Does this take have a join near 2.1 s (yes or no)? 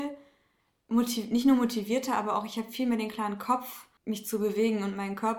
no